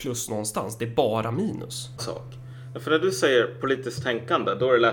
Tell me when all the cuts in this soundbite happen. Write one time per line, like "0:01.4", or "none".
0:02.0